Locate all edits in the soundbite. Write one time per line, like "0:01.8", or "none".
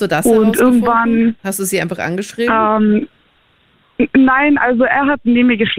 none